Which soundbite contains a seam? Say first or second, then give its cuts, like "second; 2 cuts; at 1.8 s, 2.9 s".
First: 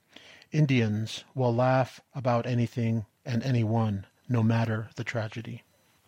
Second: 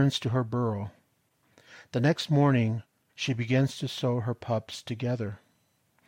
second; 1 cut; at 3.1 s